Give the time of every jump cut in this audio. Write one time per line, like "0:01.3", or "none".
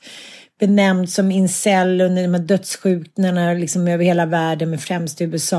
none